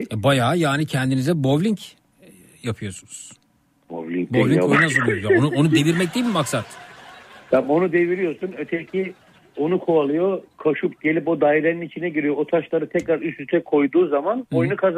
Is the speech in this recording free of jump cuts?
yes; 0 cuts

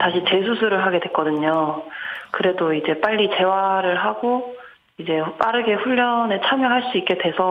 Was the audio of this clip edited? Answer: no; 0 cuts

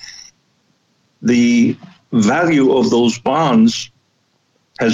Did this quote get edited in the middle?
no; 0 cuts

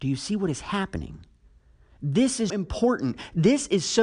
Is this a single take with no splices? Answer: no; 1 cut; at 2.5 s

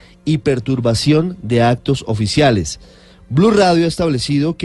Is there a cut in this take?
no; 0 cuts

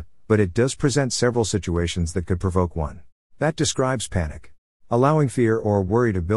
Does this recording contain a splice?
yes; 2 cuts; at 3.3 s, 4.7 s

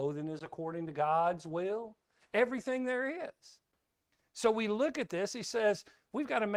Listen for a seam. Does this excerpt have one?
no; 0 cuts

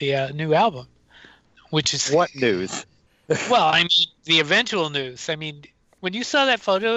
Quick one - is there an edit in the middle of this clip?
no; 0 cuts

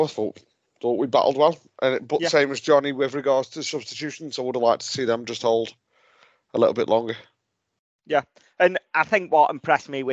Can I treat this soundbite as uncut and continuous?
yes; 0 cuts

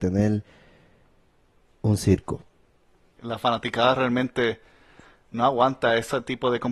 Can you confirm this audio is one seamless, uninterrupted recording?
no; 1 cut; at 3.2 s

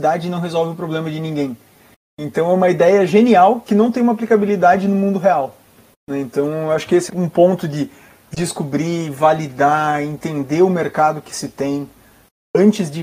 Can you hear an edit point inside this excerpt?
yes; 1 cut; at 7.1 s

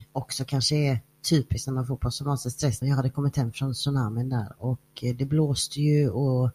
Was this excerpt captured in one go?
no; 1 cut; at 2.8 s

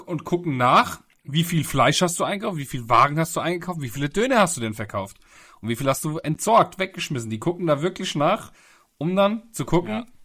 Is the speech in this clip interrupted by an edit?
no; 0 cuts

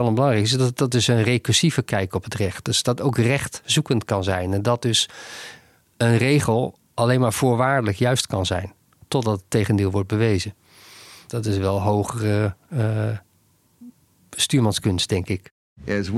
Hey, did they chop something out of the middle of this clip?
no; 0 cuts

